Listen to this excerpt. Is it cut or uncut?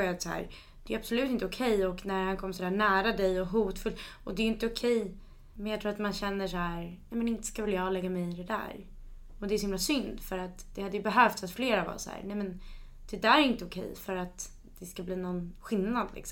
uncut